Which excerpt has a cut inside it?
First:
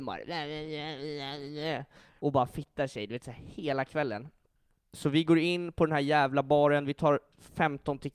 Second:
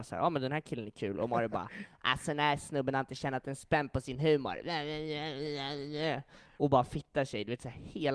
first; 1 cut; at 4.9 s

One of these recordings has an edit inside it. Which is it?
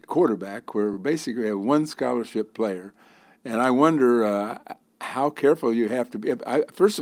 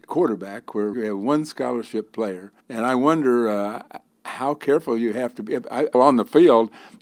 second; 3 cuts; at 0.9 s, 2.6 s, 5.9 s

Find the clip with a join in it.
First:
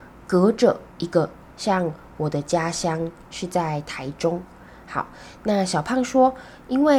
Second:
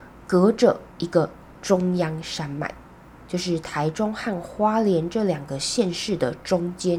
first; 1 cut; at 1.5 s

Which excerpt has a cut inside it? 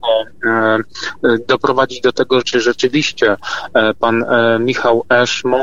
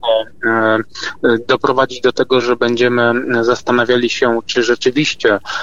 first; 1 cut; at 2.4 s

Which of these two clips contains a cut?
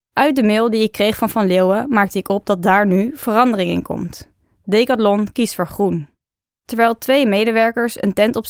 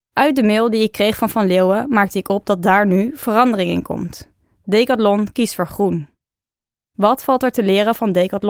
first; 1 cut; at 6.5 s

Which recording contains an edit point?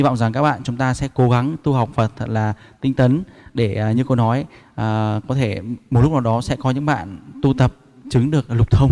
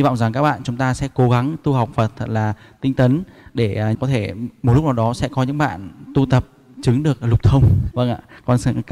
second; 2 cuts; at 3.9 s, 7.9 s

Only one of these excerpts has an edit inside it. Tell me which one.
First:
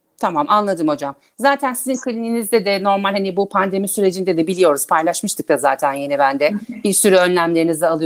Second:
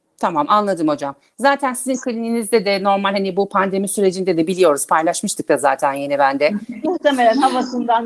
second; 1 cut; at 6.8 s

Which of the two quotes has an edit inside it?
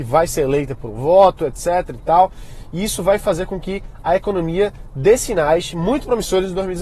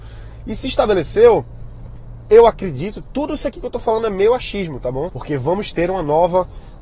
second; 1 cut; at 5.1 s

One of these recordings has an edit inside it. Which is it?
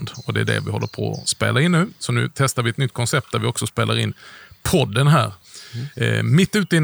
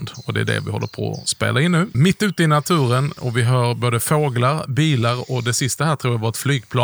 second; 1 cut; at 1.9 s

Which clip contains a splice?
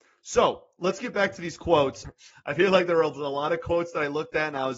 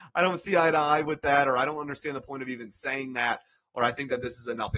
first; 1 cut; at 2.0 s

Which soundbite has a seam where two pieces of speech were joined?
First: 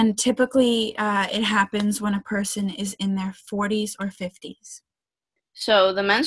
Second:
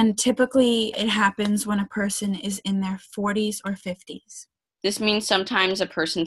second; 2 cuts; at 0.9 s, 4.8 s

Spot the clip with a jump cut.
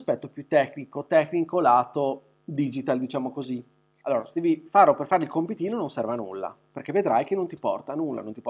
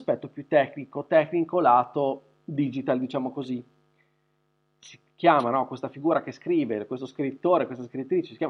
first; 1 cut; at 4.0 s

